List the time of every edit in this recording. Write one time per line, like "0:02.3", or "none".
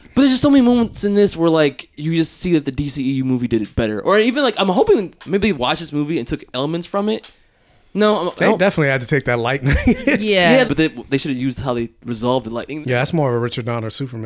0:10.6
0:12.8